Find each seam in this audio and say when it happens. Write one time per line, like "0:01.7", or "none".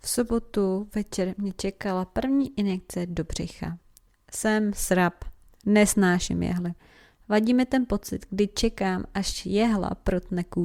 none